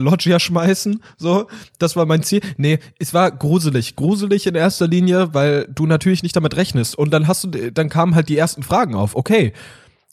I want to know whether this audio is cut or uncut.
uncut